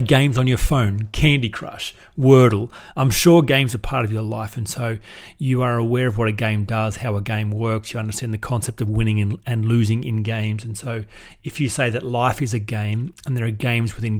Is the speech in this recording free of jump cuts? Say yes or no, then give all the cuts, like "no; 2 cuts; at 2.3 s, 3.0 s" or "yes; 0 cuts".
yes; 0 cuts